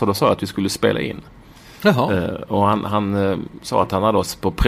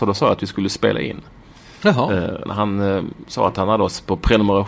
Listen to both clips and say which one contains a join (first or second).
second